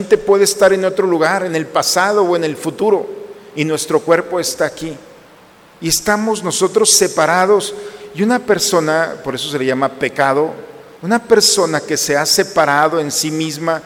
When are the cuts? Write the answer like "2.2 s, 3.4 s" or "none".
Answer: none